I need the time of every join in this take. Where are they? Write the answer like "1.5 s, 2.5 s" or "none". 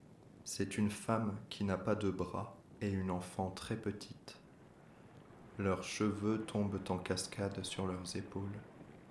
none